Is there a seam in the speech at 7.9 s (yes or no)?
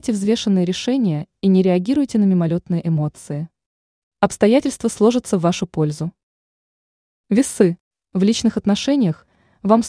no